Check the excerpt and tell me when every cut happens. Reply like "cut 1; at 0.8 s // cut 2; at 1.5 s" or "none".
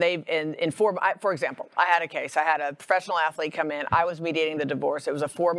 none